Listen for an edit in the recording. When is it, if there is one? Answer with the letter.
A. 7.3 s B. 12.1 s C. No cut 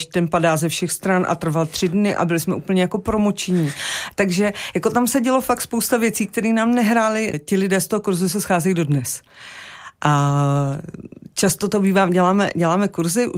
A